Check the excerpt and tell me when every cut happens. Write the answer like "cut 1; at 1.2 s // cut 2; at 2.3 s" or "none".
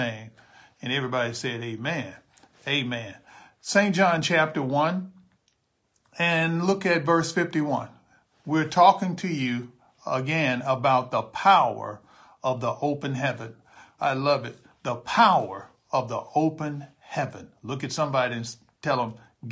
cut 1; at 14.0 s